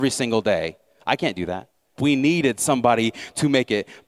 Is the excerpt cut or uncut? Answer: cut